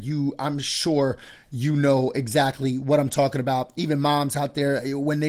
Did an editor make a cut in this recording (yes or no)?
no